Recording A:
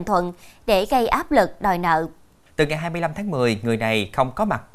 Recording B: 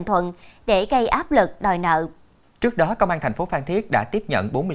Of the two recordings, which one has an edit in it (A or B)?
A